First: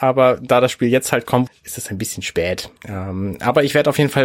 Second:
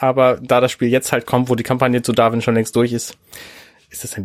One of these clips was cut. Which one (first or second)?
first